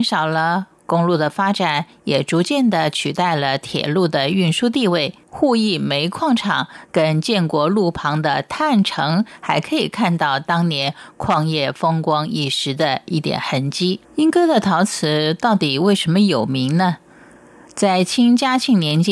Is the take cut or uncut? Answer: cut